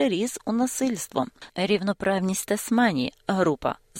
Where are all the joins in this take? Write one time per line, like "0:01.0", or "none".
0:01.5